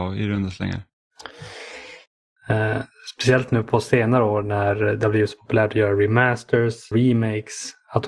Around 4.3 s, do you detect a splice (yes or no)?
no